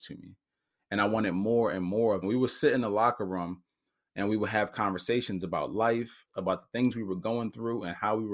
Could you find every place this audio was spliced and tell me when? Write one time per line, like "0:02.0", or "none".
0:02.2
0:06.3